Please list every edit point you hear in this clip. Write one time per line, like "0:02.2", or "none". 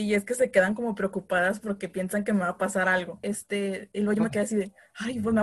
0:03.2